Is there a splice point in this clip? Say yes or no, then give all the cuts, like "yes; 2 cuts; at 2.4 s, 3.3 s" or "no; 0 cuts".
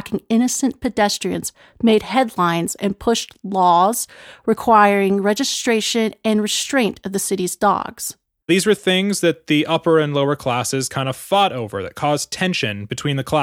yes; 1 cut; at 8.4 s